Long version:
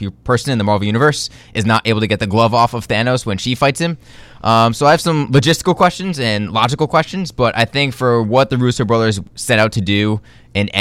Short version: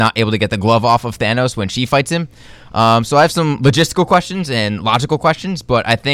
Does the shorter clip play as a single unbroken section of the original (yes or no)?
yes